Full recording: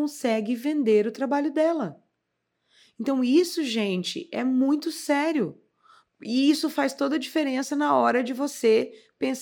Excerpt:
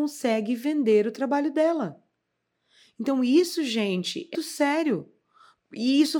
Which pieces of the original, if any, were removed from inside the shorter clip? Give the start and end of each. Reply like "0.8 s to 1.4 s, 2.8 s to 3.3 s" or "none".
4.3 s to 4.8 s